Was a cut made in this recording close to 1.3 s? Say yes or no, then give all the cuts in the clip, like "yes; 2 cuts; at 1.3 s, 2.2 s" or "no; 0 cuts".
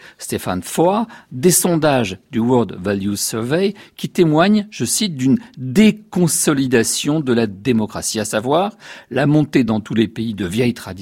yes; 1 cut; at 1.3 s